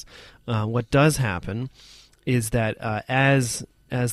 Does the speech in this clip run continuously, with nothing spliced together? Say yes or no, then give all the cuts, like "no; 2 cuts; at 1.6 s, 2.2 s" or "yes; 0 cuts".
yes; 0 cuts